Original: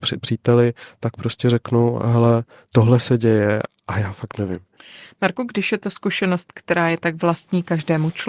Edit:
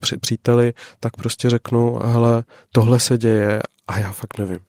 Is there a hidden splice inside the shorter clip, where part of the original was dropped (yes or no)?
no